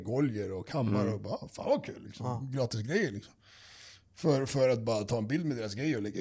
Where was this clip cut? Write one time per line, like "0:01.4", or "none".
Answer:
none